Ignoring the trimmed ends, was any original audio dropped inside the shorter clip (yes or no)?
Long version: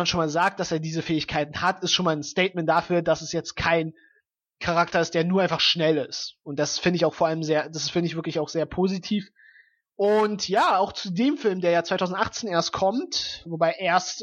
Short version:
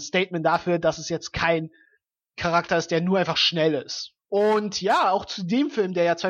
yes